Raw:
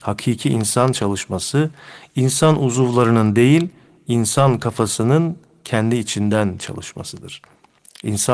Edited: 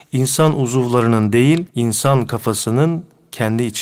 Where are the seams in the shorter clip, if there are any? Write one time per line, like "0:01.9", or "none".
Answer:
0:01.7